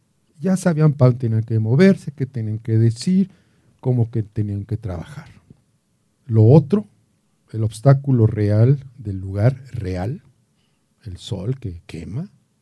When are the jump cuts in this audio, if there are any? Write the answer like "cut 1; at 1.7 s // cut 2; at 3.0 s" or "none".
none